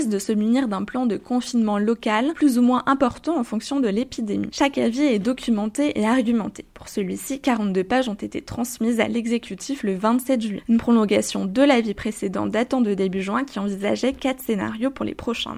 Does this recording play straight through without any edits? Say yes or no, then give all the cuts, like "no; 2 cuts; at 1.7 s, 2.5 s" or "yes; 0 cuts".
yes; 0 cuts